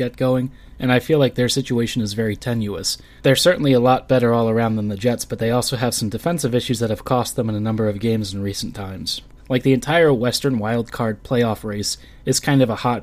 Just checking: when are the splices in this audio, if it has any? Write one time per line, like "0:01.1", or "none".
0:03.2
0:09.4